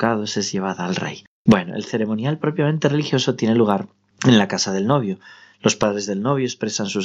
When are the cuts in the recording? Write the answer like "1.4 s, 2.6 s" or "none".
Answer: none